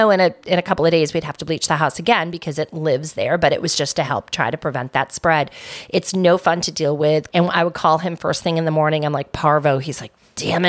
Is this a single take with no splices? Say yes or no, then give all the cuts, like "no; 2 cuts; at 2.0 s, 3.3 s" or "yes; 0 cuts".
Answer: no; 1 cut; at 7.3 s